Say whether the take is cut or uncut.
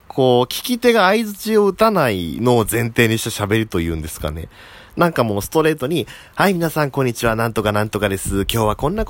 uncut